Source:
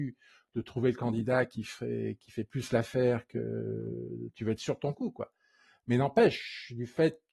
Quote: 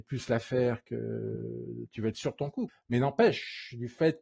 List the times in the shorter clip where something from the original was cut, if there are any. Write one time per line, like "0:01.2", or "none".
0:02.7